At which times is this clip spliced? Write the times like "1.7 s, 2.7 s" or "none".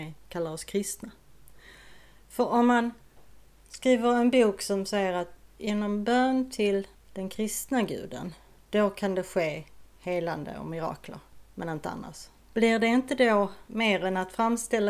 13.7 s